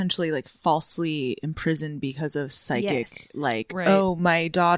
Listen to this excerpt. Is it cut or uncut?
uncut